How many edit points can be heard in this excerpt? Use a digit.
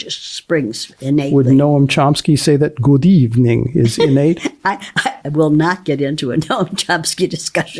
1